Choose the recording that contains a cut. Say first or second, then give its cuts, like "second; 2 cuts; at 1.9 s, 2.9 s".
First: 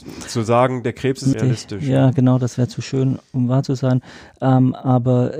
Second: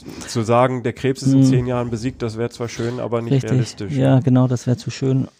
first; 1 cut; at 1.3 s